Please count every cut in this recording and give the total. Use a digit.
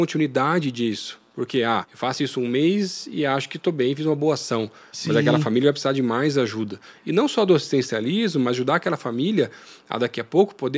1